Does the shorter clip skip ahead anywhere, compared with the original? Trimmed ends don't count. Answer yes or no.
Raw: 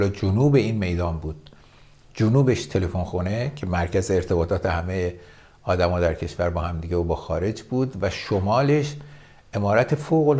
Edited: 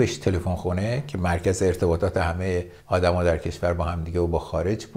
yes